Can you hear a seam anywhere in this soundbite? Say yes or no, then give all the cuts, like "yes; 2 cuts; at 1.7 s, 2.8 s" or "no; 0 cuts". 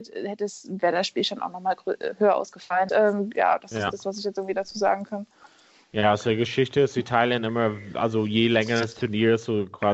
yes; 1 cut; at 2.9 s